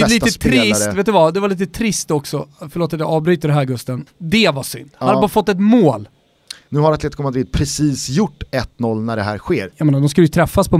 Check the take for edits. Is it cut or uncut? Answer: cut